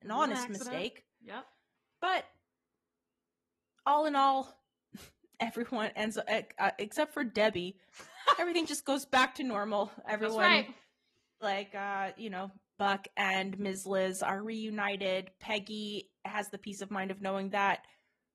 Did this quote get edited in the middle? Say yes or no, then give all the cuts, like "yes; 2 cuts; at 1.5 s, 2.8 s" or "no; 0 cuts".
yes; 3 cuts; at 5.9 s, 11.4 s, 12.8 s